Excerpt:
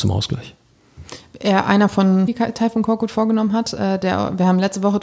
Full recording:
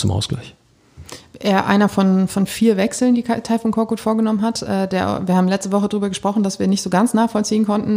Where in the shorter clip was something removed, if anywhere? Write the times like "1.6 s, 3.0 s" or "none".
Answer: 2.3 s